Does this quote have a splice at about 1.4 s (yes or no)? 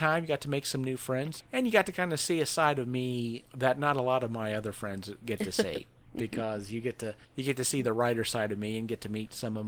yes